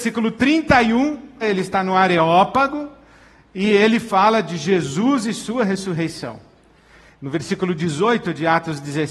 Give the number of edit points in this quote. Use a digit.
2